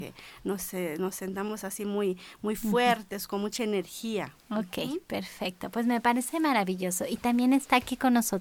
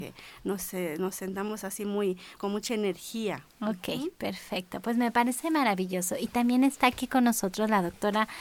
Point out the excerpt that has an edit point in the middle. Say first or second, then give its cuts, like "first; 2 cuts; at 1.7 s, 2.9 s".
second; 1 cut; at 2.4 s